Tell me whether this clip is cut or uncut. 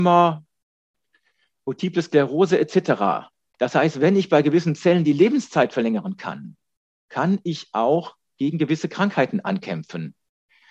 cut